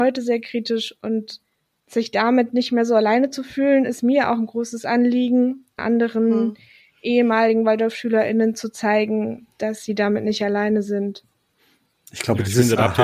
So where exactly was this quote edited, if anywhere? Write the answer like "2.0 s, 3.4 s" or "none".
5.8 s